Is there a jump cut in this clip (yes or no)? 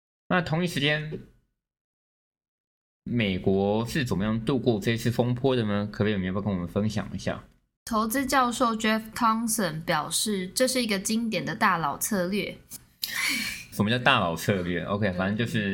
yes